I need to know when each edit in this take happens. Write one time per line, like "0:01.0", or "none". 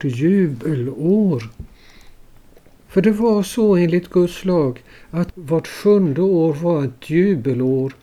0:02.9